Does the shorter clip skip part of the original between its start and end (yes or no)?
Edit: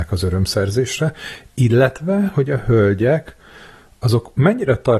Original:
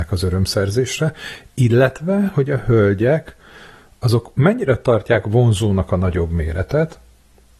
no